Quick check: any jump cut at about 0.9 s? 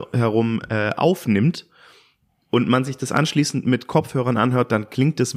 no; 0 cuts

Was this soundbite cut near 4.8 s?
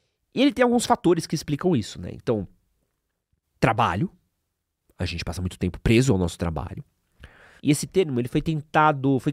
no; 2 cuts; at 3.4 s, 7.6 s

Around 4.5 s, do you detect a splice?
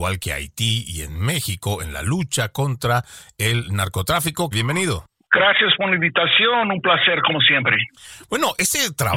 yes; 1 cut; at 4.5 s

